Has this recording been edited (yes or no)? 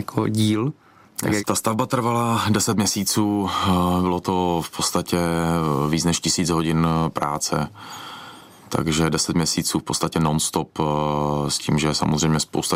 yes